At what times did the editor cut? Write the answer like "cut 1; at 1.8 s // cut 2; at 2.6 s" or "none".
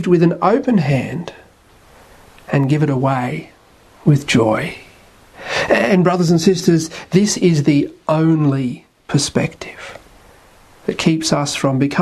none